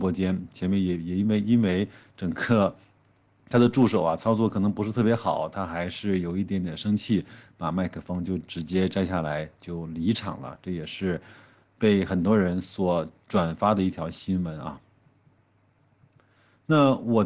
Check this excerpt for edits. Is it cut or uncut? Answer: uncut